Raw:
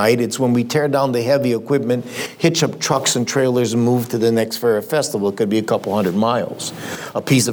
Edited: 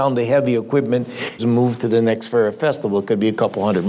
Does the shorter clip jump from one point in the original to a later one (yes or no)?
yes